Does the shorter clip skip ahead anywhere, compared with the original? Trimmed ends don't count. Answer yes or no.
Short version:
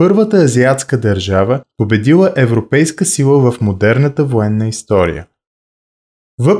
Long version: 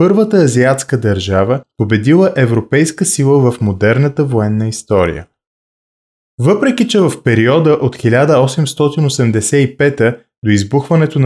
no